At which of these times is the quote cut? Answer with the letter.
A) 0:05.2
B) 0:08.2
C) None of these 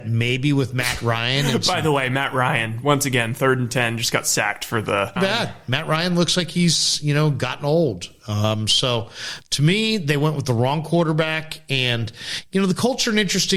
A